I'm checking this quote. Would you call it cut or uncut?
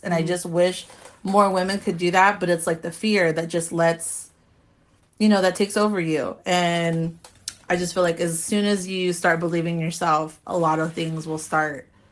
uncut